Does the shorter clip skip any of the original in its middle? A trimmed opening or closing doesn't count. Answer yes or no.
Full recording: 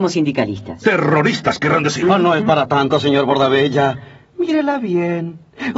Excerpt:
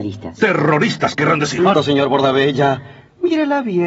yes